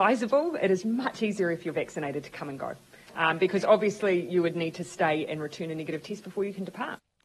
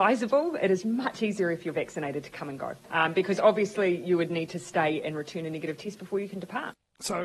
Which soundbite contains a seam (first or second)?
second